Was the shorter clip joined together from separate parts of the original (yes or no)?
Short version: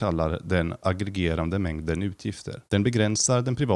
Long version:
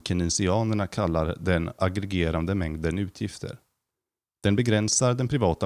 yes